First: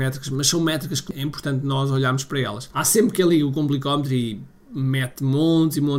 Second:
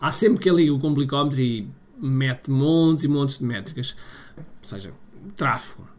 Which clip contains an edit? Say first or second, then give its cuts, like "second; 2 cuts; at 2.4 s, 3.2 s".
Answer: second; 1 cut; at 4.4 s